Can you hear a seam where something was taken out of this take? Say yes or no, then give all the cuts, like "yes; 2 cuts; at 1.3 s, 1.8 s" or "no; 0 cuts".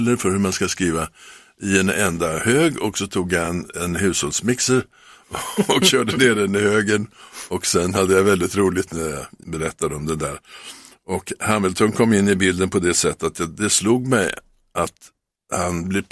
no; 0 cuts